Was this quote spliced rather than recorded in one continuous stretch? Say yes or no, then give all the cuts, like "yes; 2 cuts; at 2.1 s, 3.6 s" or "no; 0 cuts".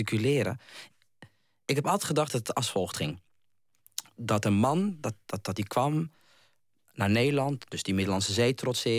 no; 0 cuts